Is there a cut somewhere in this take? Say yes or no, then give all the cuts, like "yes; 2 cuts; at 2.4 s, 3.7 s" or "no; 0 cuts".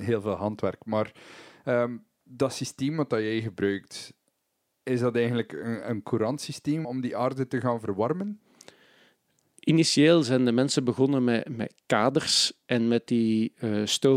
yes; 1 cut; at 6.8 s